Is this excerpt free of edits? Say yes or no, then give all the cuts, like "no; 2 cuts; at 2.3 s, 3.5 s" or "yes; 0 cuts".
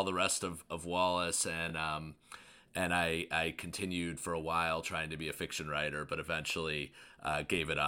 yes; 0 cuts